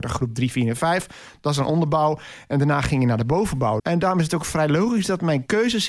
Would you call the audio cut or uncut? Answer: cut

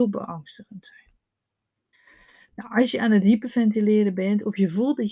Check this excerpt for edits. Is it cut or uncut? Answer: uncut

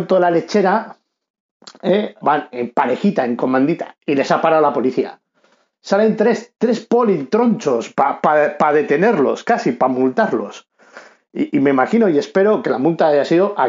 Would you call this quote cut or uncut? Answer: cut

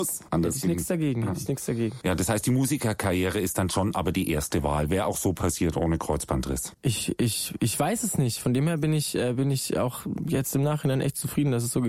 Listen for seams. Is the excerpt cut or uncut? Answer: uncut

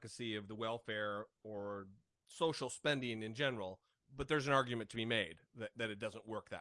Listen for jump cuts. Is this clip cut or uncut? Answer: uncut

